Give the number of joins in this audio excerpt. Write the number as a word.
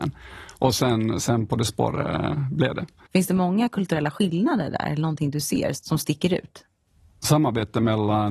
one